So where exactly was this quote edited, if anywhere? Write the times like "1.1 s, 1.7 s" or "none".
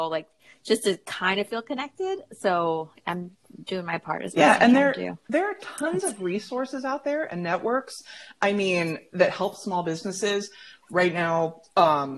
none